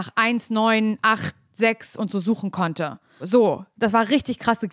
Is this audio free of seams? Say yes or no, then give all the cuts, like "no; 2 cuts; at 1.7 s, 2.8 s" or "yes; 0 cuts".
no; 1 cut; at 3.2 s